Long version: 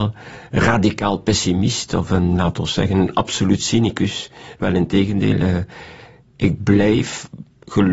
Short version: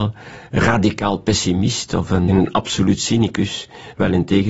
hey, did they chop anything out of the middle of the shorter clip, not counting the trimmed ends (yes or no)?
yes